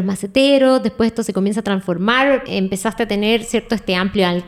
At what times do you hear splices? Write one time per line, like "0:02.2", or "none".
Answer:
0:02.5